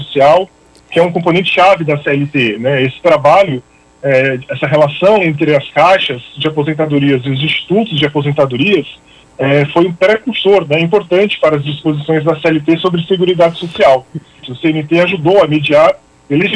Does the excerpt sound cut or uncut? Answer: cut